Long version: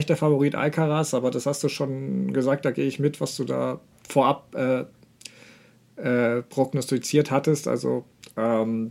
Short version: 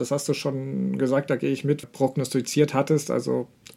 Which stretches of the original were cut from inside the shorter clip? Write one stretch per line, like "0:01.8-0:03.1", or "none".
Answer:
0:03.2-0:06.4